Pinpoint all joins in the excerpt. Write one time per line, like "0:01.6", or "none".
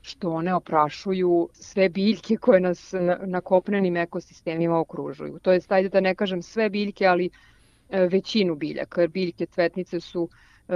none